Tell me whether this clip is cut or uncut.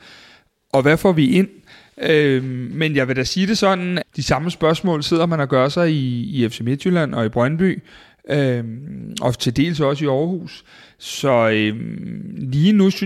cut